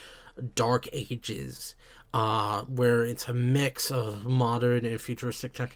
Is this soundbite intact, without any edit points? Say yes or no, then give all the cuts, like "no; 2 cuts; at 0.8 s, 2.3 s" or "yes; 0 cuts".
yes; 0 cuts